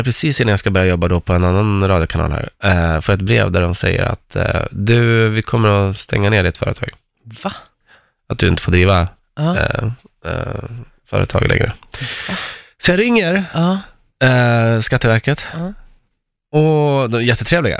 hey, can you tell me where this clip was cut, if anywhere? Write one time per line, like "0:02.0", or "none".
none